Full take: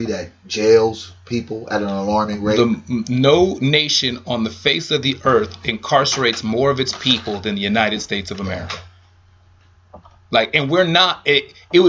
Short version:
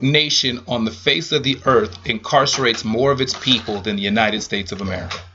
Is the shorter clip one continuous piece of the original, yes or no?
yes